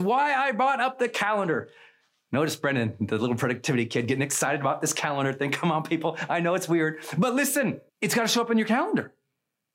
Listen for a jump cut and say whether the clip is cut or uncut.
cut